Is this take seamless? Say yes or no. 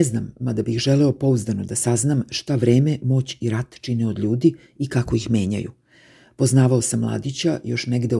yes